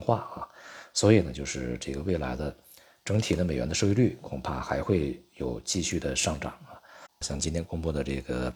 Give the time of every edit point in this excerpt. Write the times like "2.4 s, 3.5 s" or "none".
7.2 s

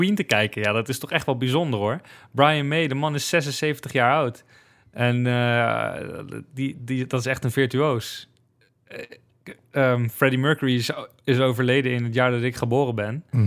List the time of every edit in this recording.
none

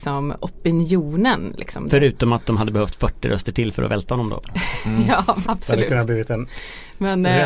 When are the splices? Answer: 1.9 s, 5.4 s

